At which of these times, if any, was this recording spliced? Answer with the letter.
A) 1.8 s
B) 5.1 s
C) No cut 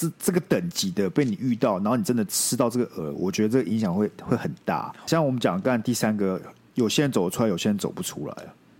B